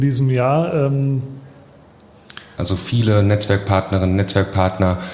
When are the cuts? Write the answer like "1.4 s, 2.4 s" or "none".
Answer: 2.6 s